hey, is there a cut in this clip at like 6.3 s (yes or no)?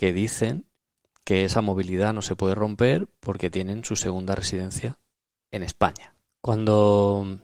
yes